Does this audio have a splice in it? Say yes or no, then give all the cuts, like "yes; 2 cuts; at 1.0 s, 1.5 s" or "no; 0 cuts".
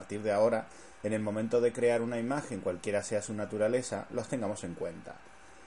no; 0 cuts